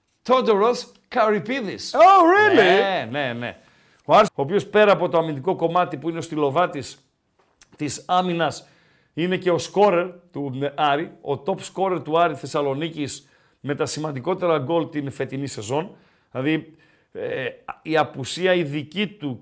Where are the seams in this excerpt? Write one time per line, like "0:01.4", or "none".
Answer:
0:04.3